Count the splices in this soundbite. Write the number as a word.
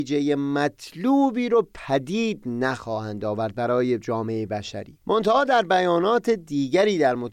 one